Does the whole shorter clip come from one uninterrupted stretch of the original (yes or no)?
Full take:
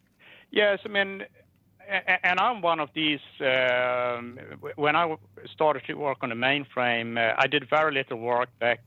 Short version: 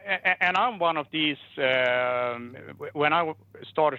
yes